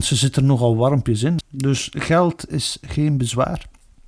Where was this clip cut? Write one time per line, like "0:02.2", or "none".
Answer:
0:01.4